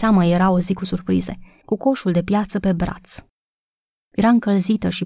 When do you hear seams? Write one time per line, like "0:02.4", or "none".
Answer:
0:01.6